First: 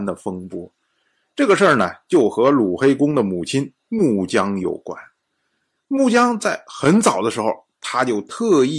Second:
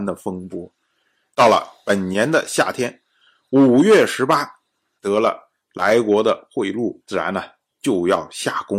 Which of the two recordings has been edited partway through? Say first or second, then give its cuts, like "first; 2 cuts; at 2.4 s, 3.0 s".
second; 3 cuts; at 1.3 s, 5.0 s, 7.0 s